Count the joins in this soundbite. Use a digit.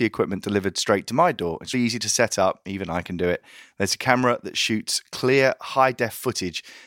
1